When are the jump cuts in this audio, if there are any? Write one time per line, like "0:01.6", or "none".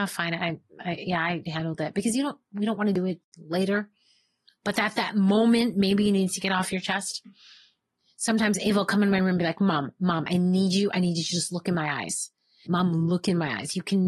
0:12.7

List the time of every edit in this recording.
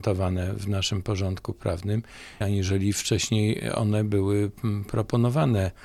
0:02.4

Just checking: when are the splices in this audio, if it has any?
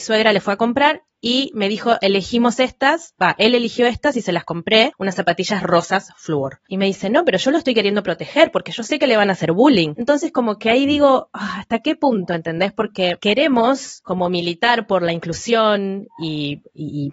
0:06.7

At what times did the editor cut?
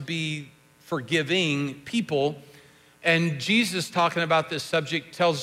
none

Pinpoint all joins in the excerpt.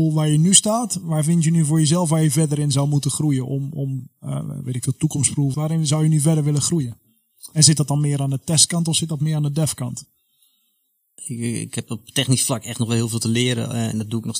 0:05.5
0:11.2

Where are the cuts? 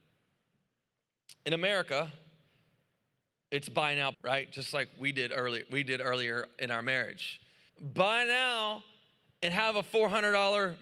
0:04.1
0:07.7

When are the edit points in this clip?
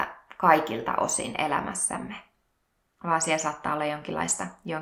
none

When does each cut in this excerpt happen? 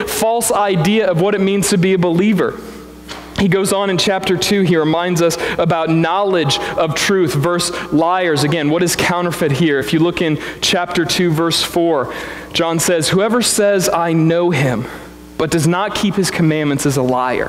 none

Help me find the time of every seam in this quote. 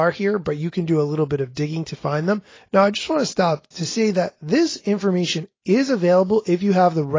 0:02.6

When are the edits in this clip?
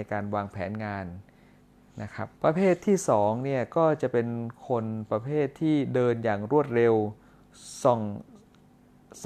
0:02.3

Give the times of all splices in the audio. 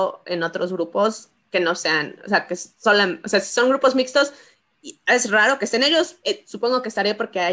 0:06.2

